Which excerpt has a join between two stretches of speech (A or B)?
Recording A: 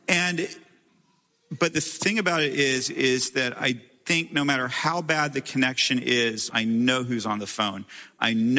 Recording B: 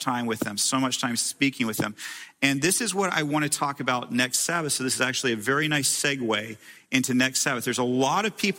A